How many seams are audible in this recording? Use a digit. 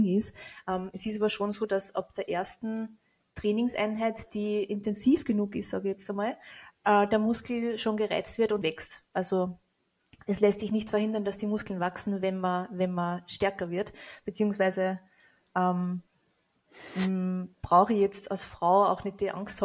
2